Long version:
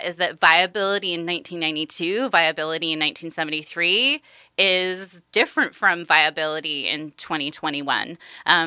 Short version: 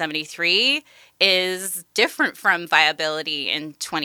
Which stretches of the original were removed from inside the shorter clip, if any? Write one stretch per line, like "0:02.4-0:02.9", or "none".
none